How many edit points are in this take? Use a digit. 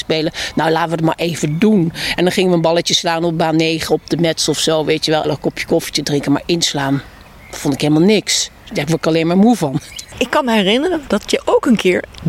2